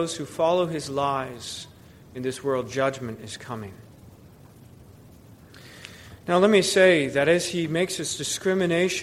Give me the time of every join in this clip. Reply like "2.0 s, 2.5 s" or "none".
none